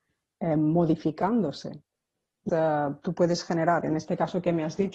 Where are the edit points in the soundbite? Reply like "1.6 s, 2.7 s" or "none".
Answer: 2.5 s